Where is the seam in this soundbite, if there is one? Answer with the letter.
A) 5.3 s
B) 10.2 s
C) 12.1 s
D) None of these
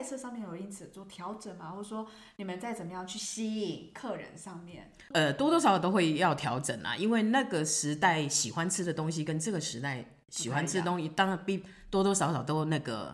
D